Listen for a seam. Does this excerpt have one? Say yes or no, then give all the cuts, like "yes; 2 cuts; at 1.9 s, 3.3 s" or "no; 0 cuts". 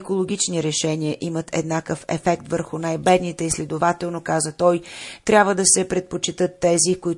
no; 0 cuts